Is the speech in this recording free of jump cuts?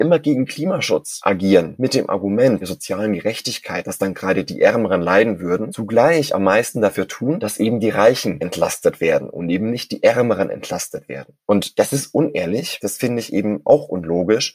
yes; 0 cuts

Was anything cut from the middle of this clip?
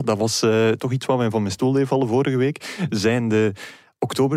no; 0 cuts

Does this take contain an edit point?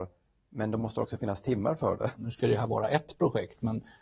yes; 1 cut; at 2.1 s

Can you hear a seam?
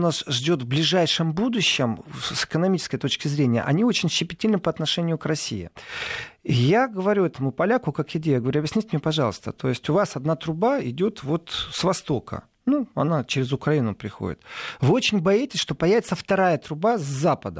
no; 0 cuts

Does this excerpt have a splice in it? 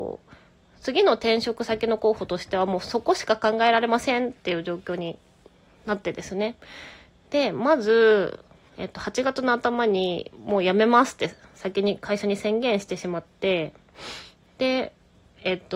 no; 0 cuts

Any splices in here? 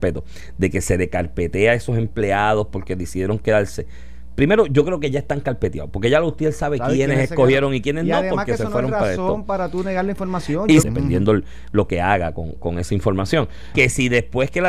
yes; 2 cuts; at 10.8 s, 13.7 s

